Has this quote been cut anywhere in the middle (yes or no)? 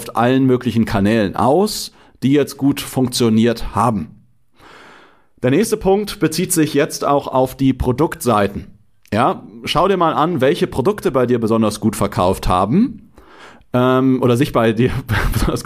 no